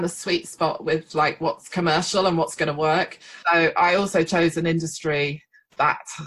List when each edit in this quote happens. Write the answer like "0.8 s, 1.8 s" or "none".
3.4 s

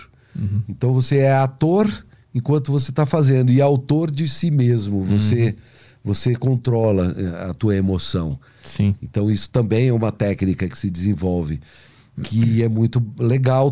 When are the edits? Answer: none

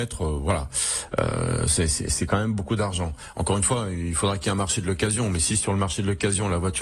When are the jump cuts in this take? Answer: none

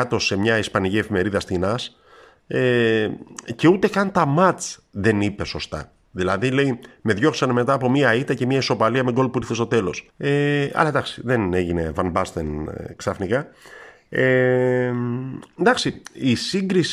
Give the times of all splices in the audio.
10.1 s

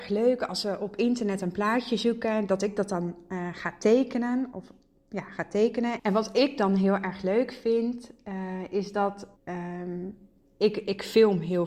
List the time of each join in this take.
6.0 s, 9.4 s

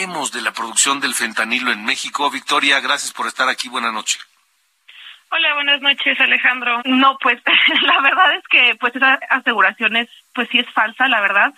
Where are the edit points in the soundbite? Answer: 6.8 s

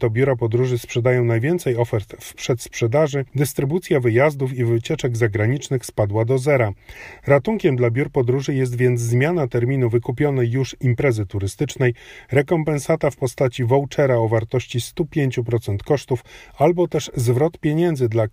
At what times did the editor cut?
3.3 s

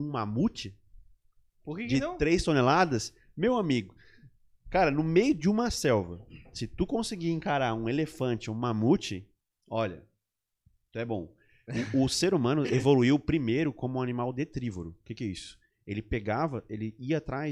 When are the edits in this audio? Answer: none

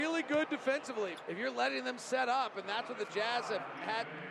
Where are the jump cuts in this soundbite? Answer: 1.2 s

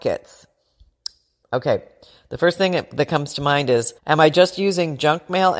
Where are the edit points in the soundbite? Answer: 1.4 s, 4.0 s

